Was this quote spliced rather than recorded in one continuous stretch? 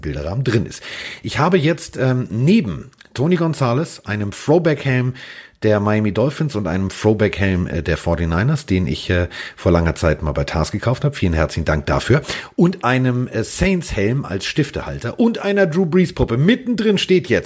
no; 0 cuts

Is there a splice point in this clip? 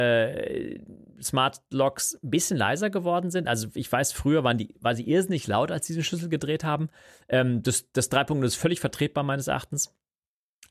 no; 0 cuts

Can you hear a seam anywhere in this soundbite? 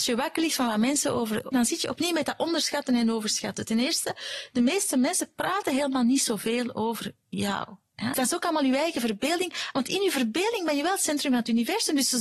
yes; 2 cuts; at 1.5 s, 8.1 s

